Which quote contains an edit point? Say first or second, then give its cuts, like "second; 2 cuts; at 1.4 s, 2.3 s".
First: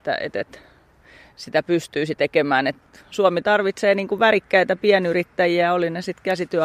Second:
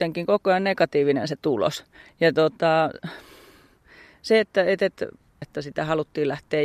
second; 1 cut; at 5.4 s